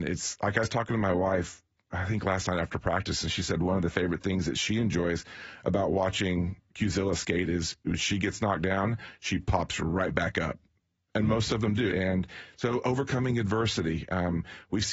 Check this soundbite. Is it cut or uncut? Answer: cut